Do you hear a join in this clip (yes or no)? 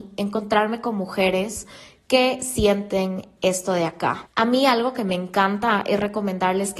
yes